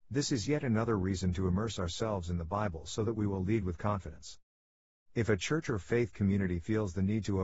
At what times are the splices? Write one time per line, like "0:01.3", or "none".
none